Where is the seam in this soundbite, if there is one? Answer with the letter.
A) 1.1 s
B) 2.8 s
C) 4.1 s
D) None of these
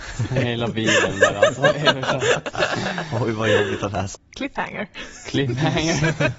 C